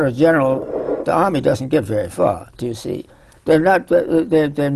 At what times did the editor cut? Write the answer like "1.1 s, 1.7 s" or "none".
2.5 s